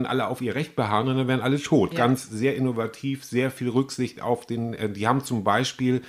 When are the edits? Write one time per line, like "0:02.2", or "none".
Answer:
0:01.9